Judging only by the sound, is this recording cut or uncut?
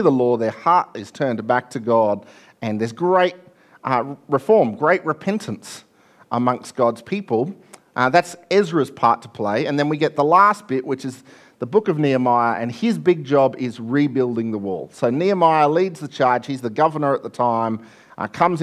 uncut